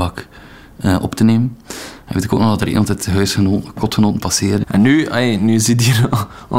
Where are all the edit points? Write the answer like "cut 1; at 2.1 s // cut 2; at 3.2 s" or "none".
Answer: cut 1; at 4.6 s